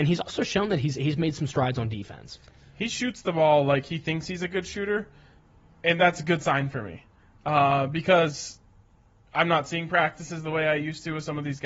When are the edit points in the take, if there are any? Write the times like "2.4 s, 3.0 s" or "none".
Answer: none